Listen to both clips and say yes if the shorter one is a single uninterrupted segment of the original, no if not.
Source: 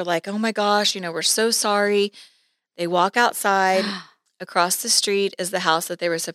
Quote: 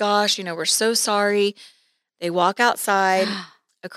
yes